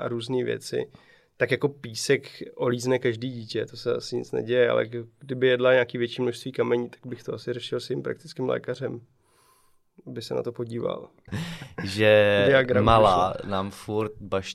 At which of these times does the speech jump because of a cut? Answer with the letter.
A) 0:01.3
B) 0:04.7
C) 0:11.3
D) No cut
C